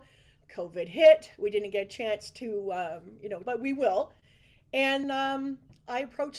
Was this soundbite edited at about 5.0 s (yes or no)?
yes